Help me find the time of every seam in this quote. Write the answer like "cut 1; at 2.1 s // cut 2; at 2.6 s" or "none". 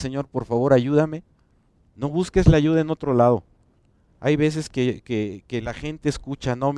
cut 1; at 1.8 s